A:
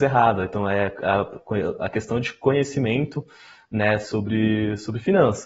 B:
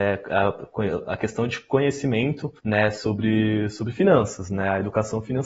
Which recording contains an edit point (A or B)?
B